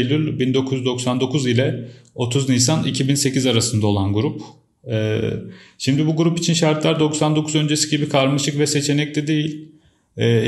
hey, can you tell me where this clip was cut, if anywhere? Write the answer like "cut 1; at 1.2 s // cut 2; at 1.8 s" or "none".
none